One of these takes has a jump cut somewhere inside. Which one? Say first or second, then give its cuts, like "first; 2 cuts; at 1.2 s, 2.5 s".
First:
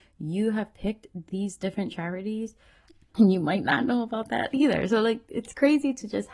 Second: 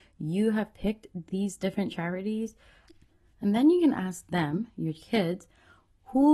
first; 1 cut; at 3.1 s